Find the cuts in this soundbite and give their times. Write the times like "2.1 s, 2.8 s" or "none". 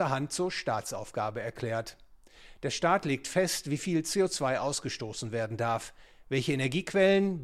none